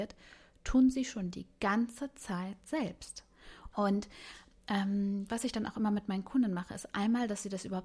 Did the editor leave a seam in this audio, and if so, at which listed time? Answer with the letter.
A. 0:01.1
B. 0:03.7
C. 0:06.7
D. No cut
B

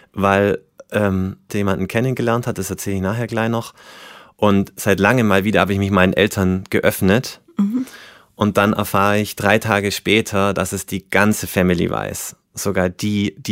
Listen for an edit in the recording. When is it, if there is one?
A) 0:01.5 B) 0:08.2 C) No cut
A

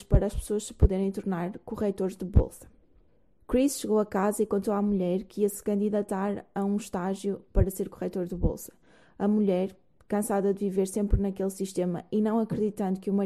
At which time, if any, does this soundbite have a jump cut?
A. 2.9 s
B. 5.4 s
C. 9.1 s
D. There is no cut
D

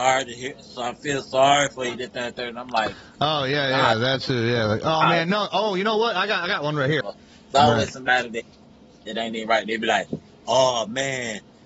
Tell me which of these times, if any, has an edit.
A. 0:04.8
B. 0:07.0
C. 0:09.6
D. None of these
B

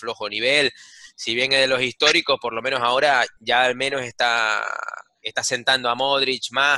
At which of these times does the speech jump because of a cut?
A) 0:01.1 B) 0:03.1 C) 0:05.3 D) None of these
D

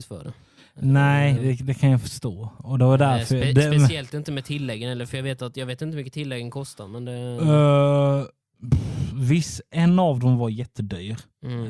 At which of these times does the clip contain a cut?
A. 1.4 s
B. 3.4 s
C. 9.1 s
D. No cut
A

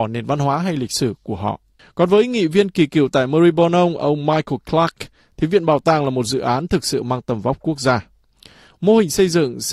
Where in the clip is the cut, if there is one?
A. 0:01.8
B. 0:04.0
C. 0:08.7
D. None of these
A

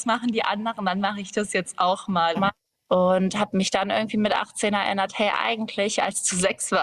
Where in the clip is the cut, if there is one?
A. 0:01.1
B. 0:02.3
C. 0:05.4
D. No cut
B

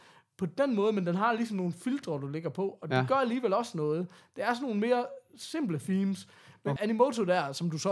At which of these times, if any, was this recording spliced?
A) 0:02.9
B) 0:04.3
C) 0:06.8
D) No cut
C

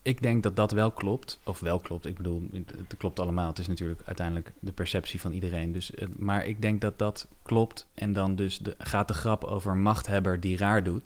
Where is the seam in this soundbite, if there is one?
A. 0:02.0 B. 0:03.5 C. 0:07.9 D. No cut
C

